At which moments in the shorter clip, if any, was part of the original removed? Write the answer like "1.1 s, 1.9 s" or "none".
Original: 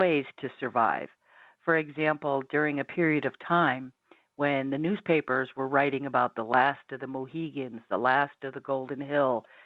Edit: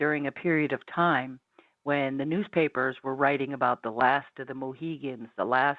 none

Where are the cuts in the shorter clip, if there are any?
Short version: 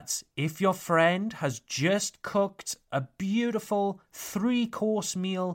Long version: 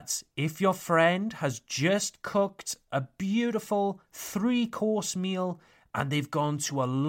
none

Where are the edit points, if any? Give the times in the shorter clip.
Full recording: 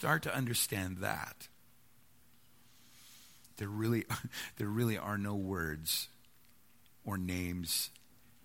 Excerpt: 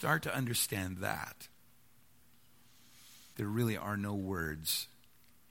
3.3 s

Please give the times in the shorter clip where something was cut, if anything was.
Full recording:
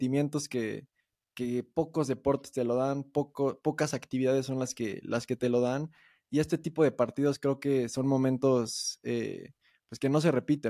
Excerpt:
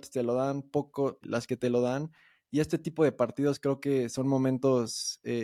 1.2 s

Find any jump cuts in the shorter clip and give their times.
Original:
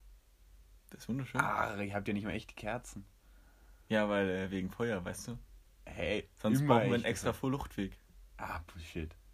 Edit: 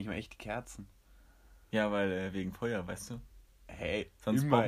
none

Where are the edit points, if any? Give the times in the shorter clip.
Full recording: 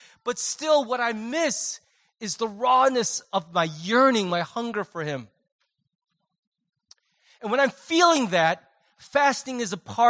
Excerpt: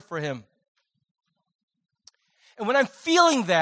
none

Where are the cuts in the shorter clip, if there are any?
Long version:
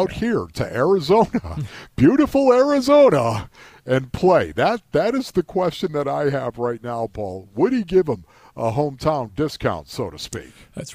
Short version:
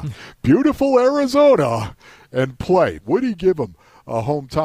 3.0 s

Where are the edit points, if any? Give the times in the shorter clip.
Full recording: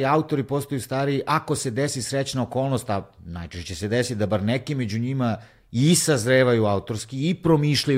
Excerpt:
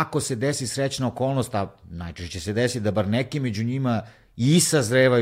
none

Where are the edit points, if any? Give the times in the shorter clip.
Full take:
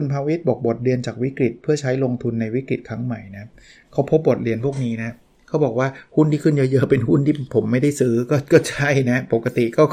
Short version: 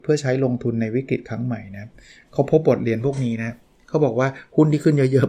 none

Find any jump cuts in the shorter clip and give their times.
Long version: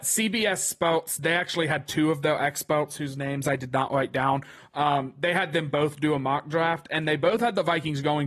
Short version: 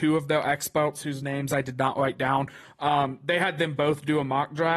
none

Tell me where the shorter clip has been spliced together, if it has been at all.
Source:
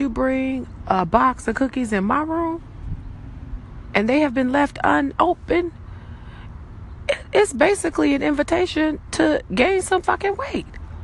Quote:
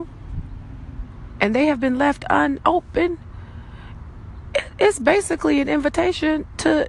none

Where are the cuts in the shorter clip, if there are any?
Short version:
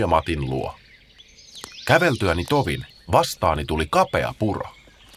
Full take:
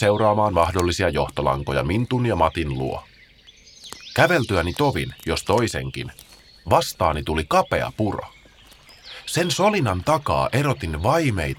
2.9 s

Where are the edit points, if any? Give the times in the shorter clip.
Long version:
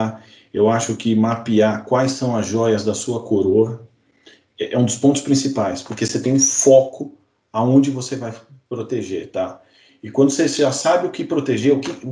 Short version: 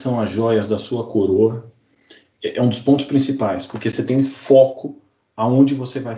none

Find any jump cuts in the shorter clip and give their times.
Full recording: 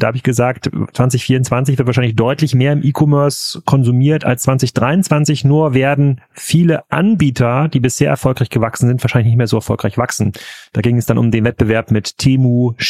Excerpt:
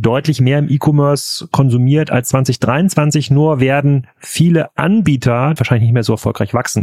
5.6 s

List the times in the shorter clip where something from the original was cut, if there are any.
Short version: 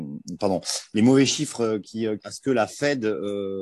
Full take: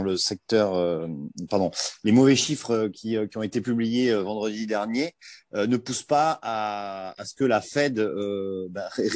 2.2 s

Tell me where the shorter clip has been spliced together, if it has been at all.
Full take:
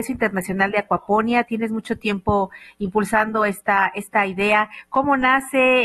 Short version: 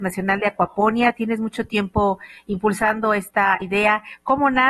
3.6 s

